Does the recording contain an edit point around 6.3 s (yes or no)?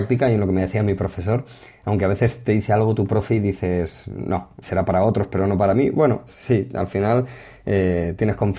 yes